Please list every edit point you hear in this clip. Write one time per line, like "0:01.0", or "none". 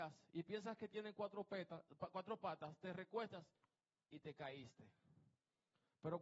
none